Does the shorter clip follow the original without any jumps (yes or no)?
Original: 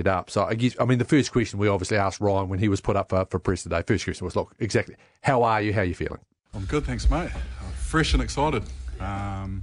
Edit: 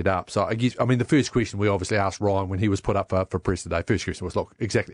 yes